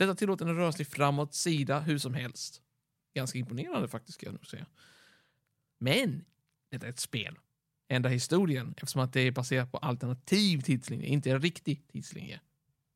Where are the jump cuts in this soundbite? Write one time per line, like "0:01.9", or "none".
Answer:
0:05.7
0:07.7